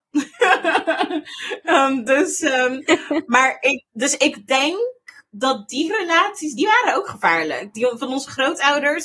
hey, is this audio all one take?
no; 1 cut; at 3.9 s

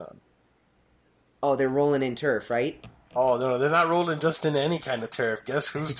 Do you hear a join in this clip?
no; 0 cuts

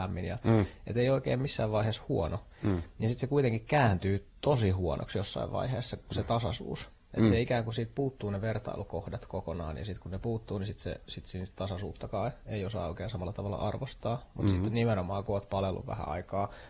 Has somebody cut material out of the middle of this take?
no; 0 cuts

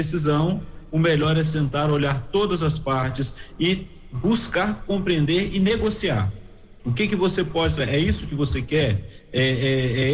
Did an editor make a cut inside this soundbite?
no; 0 cuts

